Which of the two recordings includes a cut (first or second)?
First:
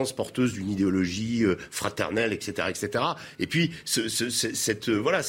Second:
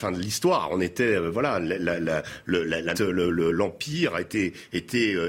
second